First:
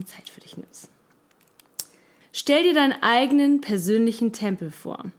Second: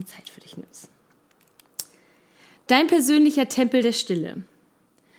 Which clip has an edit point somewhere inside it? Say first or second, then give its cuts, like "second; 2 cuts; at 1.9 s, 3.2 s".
first; 1 cut; at 2.2 s